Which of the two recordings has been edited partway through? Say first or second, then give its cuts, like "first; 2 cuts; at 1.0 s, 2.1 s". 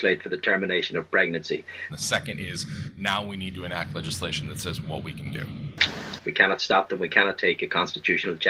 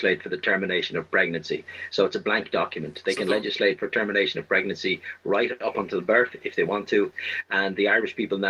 first; 2 cuts; at 1.9 s, 6.2 s